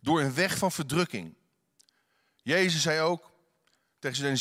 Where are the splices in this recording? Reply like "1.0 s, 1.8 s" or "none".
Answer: none